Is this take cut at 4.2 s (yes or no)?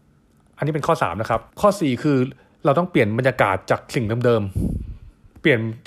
no